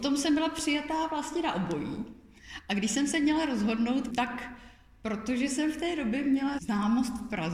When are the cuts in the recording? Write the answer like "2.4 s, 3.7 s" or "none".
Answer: 4.1 s, 6.6 s